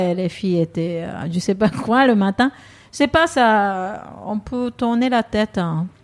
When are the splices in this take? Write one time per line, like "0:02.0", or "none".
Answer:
none